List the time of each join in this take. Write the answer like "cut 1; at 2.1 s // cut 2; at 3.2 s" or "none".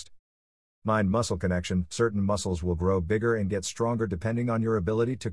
none